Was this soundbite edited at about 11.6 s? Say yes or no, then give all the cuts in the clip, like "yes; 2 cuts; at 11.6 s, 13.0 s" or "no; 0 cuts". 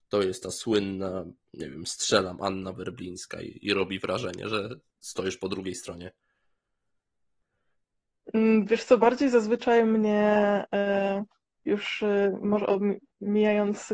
no; 0 cuts